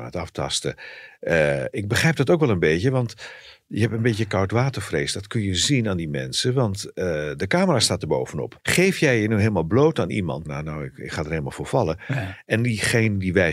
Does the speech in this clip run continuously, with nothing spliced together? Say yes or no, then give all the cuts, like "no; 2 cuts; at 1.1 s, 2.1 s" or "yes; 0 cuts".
no; 2 cuts; at 8.6 s, 10.4 s